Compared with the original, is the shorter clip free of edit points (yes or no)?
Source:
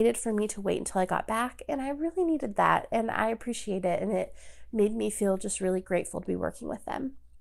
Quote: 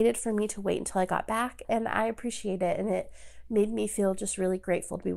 no